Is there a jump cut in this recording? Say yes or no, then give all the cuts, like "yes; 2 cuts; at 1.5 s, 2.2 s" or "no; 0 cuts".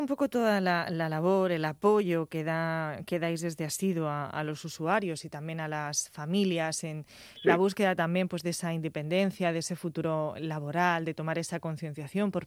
no; 0 cuts